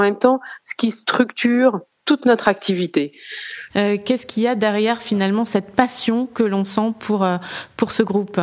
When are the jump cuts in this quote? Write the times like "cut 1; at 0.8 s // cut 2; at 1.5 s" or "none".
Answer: cut 1; at 3.7 s